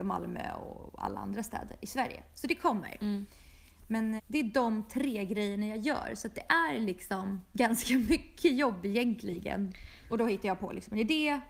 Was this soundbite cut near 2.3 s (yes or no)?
no